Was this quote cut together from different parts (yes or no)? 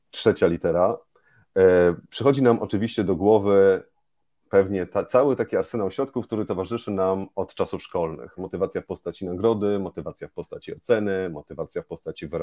yes